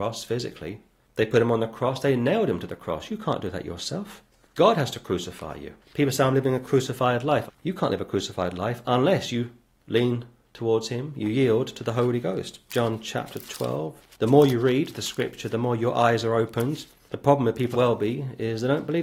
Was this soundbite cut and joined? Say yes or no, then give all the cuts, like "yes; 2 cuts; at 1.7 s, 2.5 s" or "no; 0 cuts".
yes; 3 cuts; at 7.5 s, 12.7 s, 17.7 s